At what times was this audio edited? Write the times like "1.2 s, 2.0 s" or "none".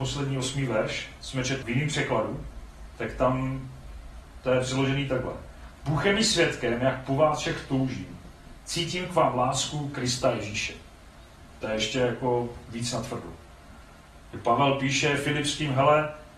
1.6 s